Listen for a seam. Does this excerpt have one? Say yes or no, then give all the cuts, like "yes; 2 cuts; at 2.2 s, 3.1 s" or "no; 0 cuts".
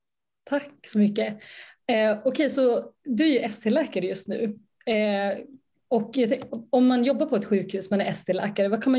no; 0 cuts